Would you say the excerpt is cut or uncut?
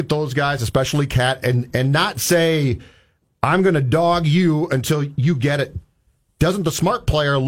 uncut